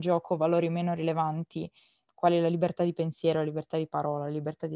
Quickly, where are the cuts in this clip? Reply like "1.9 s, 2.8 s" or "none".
2.1 s

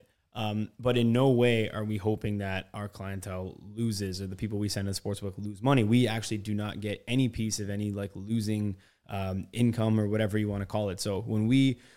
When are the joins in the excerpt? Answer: none

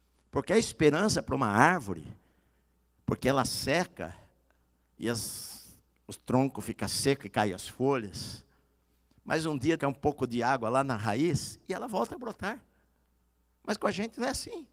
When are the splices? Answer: 9.8 s

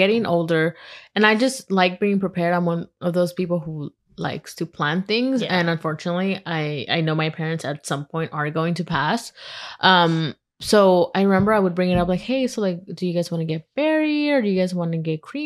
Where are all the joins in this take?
none

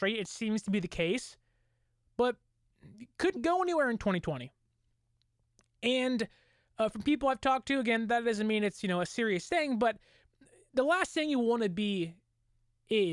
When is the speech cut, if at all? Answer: 3.4 s

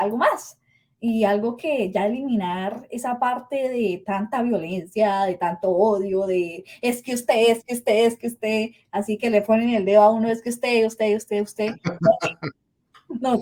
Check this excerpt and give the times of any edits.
none

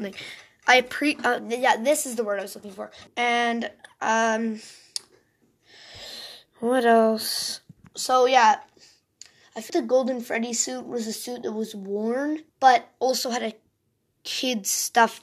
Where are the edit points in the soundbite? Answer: 3.1 s, 9.7 s, 12.5 s

